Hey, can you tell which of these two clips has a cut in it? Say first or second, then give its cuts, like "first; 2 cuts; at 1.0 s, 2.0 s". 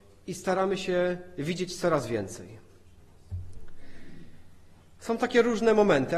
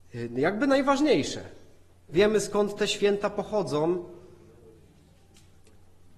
second; 1 cut; at 2.1 s